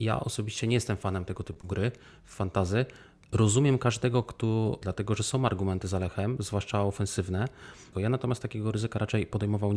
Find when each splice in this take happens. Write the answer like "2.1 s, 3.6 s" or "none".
4.8 s, 7.9 s